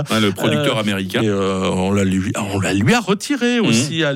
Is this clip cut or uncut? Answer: cut